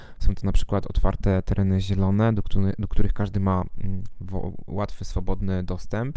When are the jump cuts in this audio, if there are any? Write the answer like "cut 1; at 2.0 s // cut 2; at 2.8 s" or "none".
none